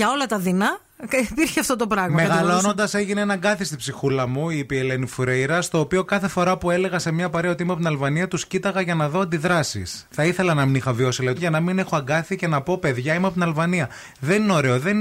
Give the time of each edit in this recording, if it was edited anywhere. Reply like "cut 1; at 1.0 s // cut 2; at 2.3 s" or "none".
cut 1; at 11.4 s